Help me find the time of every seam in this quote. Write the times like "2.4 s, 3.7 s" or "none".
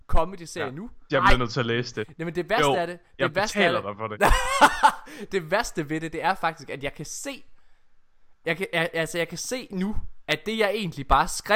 1.1 s